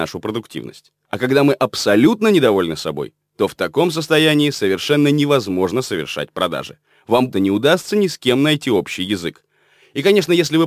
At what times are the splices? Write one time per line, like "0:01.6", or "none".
0:07.3